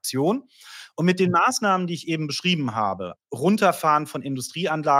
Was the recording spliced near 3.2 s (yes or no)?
yes